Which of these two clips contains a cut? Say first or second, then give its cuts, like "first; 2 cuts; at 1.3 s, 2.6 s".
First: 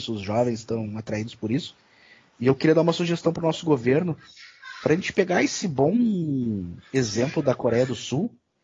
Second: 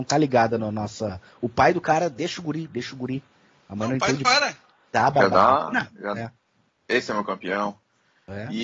second; 1 cut; at 4.2 s